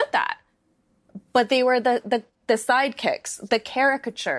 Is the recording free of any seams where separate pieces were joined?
yes; 0 cuts

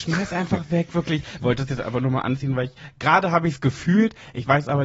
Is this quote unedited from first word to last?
no; 1 cut; at 1.4 s

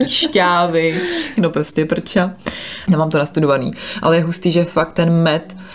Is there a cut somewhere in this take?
yes; 2 cuts; at 1.4 s, 2.9 s

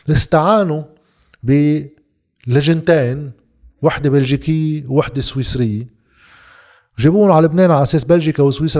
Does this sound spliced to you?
no; 0 cuts

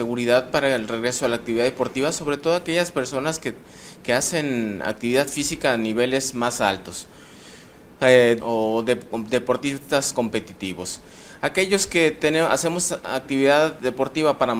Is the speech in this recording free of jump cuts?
no; 1 cut; at 8.4 s

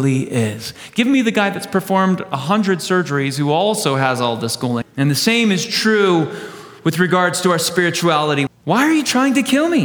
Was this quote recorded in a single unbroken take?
no; 2 cuts; at 4.8 s, 8.5 s

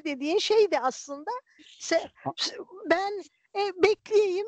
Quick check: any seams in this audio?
no; 0 cuts

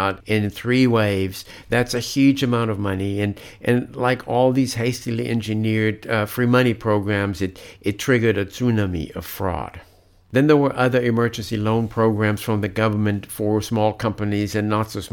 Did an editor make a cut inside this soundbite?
no; 0 cuts

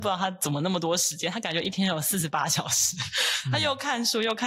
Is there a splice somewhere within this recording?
no; 0 cuts

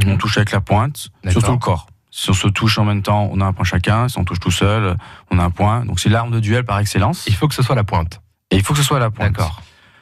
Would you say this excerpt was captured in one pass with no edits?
yes; 0 cuts

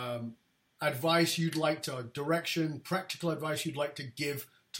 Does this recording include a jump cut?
no; 0 cuts

